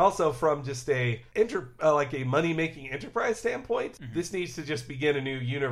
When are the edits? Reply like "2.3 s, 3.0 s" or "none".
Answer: none